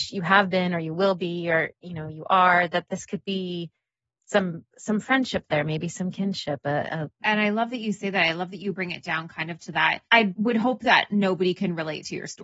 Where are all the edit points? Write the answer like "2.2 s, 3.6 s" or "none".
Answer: 7.2 s, 10.1 s